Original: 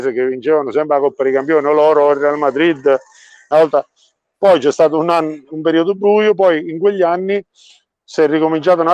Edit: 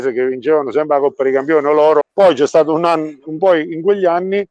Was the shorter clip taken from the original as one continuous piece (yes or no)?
no